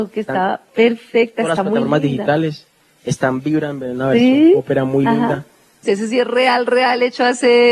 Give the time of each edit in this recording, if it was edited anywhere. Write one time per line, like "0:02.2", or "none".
0:05.8